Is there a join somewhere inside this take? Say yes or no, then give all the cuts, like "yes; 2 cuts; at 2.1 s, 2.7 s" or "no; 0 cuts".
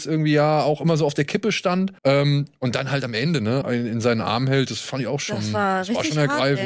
yes; 2 cuts; at 2.0 s, 3.6 s